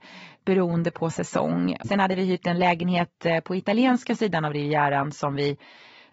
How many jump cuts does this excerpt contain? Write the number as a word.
one